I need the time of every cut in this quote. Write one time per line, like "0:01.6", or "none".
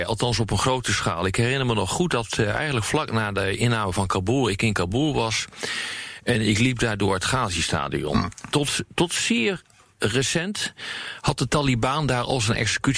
none